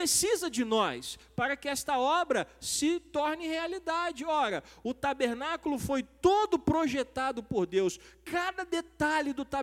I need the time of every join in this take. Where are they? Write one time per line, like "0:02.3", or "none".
none